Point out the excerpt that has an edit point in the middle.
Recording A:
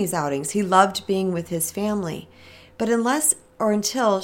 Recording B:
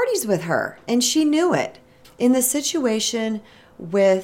B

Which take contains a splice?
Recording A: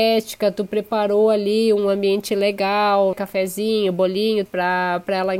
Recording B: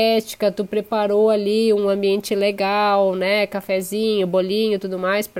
A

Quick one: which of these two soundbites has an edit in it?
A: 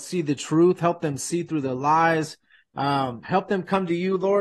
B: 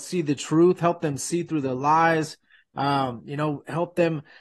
A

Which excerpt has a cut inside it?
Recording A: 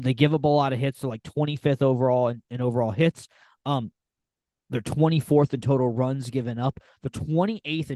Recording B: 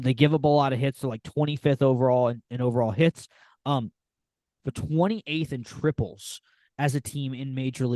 B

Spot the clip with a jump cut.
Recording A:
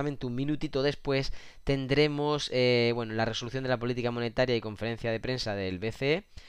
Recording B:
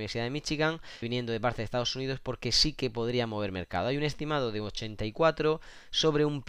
B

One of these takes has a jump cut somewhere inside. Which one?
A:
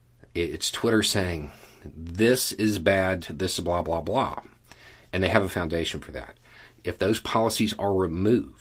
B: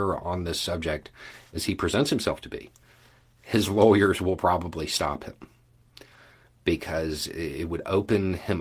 A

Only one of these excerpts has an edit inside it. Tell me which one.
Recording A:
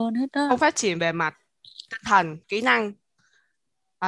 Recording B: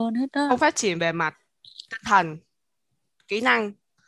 A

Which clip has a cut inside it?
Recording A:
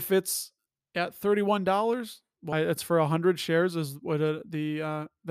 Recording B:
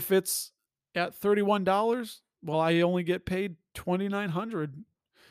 A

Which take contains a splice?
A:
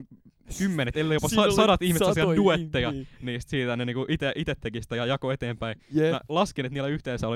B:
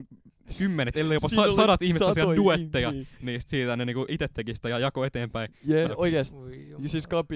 B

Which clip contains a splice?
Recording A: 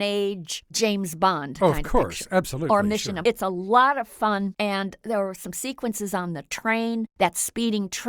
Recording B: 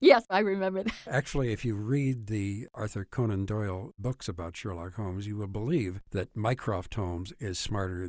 A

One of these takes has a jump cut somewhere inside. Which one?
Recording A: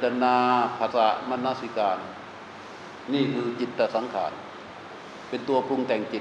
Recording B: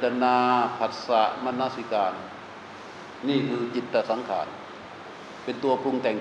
A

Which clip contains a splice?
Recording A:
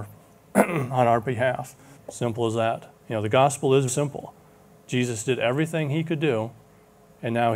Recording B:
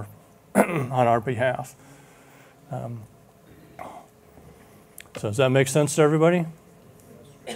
A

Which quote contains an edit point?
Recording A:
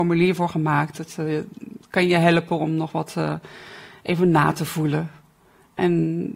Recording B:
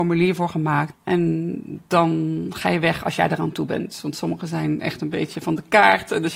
B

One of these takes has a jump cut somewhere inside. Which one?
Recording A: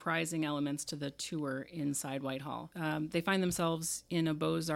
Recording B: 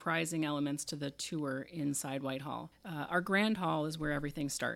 A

